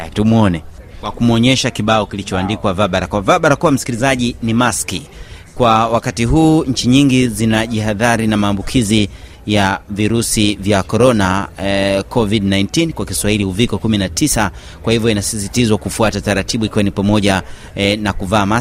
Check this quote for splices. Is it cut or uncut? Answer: uncut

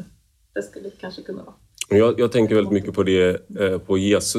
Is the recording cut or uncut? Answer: uncut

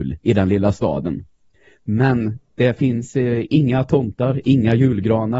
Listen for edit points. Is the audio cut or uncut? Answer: uncut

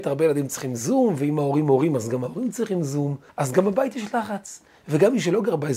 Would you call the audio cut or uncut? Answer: cut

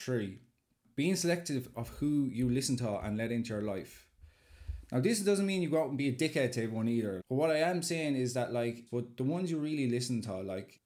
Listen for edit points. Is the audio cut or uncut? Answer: cut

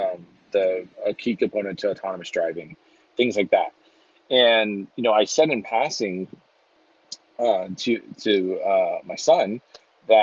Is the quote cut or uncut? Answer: cut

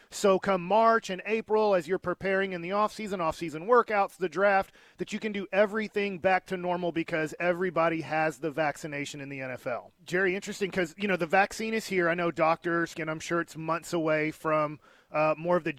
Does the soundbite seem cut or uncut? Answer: cut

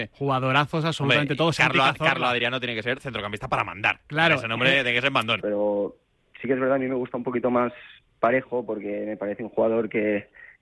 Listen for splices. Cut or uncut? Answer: cut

